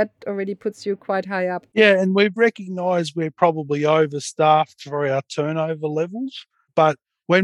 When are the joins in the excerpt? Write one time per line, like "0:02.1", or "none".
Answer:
none